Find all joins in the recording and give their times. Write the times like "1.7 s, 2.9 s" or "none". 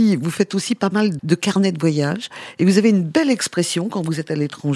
1.2 s